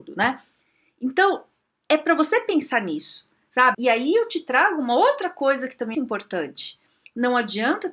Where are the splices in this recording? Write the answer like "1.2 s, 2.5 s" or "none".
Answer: 3.7 s, 5.9 s